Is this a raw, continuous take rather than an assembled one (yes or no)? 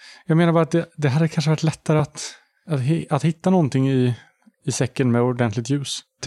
yes